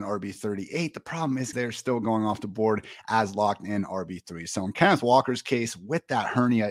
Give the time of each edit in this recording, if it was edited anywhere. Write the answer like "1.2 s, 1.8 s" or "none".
1.5 s